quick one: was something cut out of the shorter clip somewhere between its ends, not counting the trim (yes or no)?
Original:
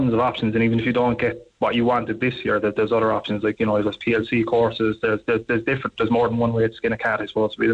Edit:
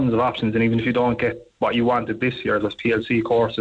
yes